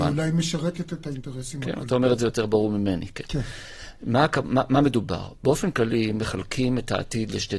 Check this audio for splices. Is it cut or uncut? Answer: uncut